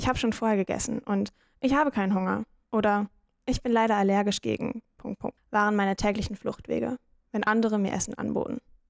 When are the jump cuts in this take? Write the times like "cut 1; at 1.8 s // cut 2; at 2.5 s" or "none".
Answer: cut 1; at 5.4 s